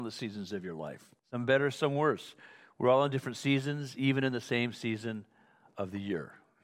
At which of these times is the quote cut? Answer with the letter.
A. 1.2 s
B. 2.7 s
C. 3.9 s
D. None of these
A